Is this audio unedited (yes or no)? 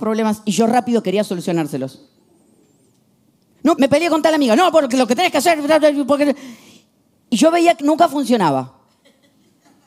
no